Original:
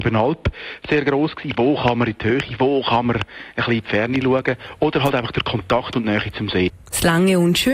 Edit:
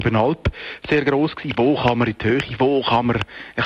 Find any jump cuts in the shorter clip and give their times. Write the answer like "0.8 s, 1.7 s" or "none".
none